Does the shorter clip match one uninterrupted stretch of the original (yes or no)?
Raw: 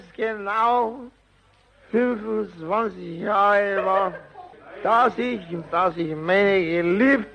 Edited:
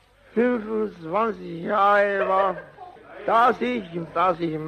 yes